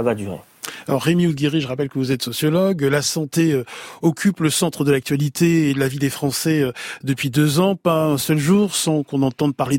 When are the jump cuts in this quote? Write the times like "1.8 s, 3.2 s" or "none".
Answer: none